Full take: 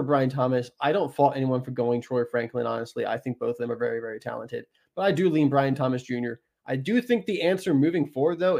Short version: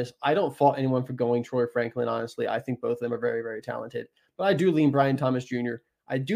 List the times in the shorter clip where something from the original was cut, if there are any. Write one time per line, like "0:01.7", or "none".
none